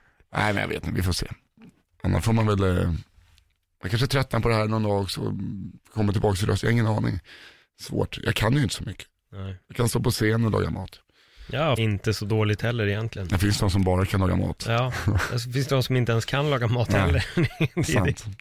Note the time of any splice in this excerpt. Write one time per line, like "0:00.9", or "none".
0:05.8
0:11.8